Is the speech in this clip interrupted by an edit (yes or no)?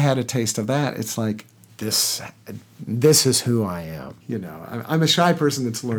yes